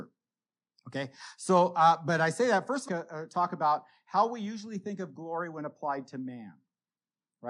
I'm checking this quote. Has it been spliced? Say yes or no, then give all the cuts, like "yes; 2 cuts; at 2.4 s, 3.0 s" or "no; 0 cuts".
yes; 1 cut; at 2.9 s